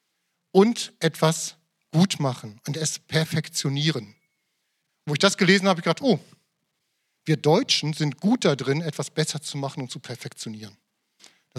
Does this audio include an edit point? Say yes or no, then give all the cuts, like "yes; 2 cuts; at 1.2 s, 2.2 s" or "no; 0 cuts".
no; 0 cuts